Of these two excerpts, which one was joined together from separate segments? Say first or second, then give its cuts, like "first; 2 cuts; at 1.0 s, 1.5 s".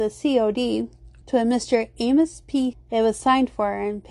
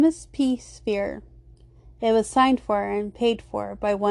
first; 2 cuts; at 1.2 s, 2.7 s